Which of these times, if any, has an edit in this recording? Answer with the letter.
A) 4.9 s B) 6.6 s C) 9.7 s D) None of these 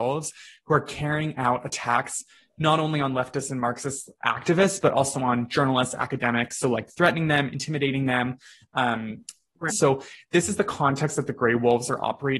C